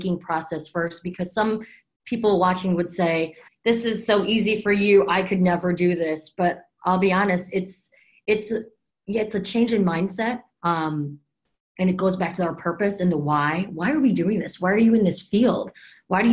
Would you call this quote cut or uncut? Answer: cut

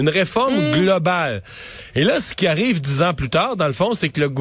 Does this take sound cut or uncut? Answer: uncut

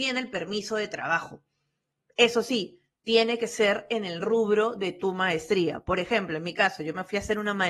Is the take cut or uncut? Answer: uncut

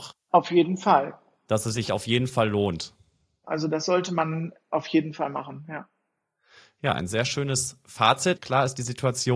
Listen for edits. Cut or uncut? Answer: cut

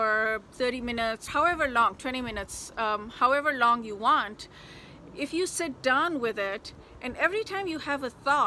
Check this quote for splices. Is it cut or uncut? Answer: cut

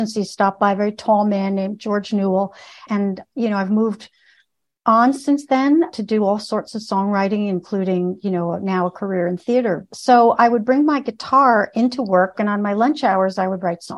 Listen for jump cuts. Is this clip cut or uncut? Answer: cut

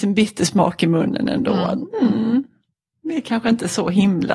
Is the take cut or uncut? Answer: uncut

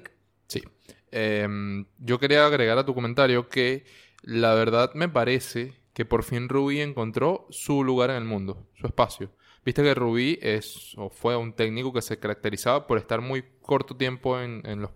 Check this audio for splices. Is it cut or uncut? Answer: uncut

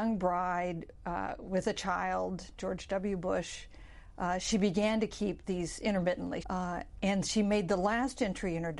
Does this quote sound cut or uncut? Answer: cut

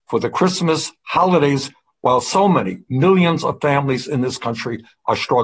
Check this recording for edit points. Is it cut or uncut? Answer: uncut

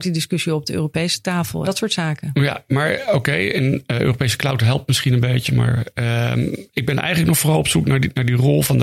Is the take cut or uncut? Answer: cut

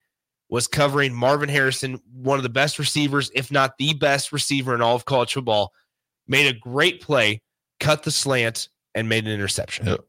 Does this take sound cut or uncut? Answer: uncut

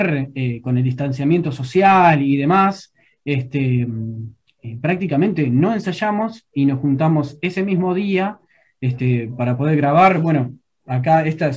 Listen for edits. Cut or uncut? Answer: uncut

